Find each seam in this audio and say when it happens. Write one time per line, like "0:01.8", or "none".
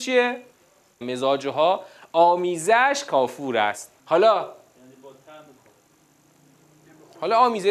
0:01.0
0:04.0